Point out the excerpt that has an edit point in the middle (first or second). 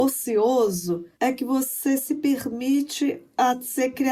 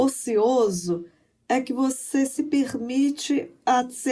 first